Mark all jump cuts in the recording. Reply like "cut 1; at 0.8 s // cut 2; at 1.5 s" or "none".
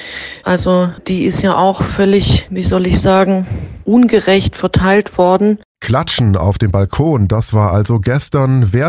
cut 1; at 5.7 s